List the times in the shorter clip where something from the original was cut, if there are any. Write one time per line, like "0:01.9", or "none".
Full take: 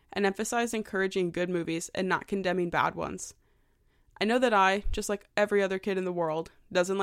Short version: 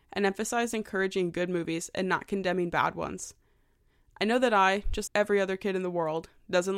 0:05.1